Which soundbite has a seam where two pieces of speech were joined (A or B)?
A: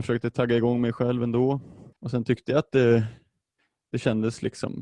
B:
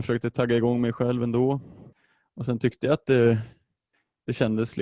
A